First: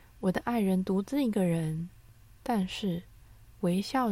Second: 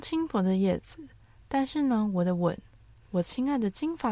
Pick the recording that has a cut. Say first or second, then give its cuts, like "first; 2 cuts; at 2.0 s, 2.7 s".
second; 1 cut; at 3.0 s